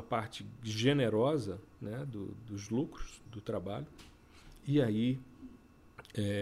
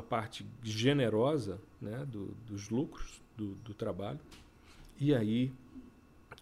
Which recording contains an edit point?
first; 1 cut; at 3.2 s

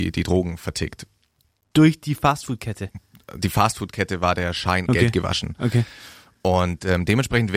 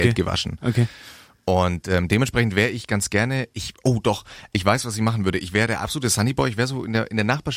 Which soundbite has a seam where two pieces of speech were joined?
first; 1 cut; at 4.9 s

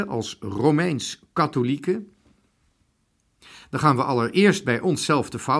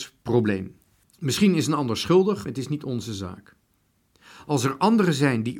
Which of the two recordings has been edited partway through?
second; 2 cuts; at 1.0 s, 2.5 s

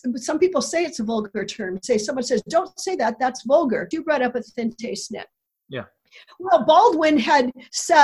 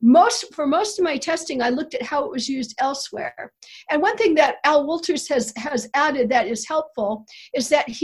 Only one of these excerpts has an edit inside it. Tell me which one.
first; 1 cut; at 3.9 s

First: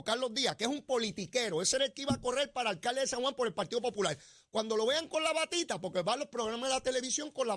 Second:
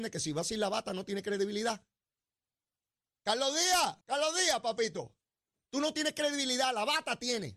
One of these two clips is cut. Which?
second; 1 cut; at 4.0 s

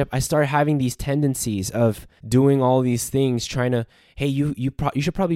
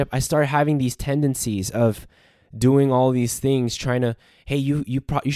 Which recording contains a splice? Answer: first; 1 cut; at 2.2 s

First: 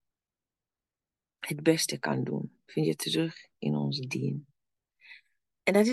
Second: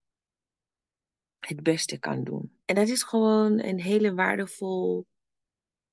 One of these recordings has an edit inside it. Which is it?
second; 1 cut; at 2.6 s

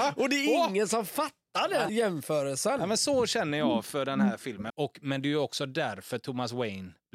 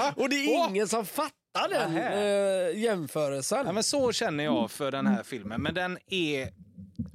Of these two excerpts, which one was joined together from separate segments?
first; 2 cuts; at 1.9 s, 4.7 s

